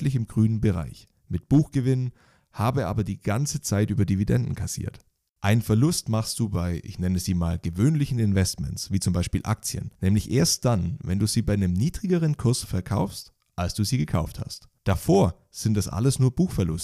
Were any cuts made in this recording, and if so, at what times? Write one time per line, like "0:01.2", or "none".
0:05.3
0:14.8